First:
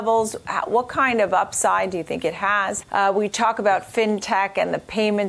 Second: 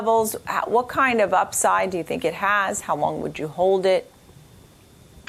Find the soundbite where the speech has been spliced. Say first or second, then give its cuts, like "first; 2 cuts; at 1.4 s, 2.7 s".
first; 1 cut; at 2.8 s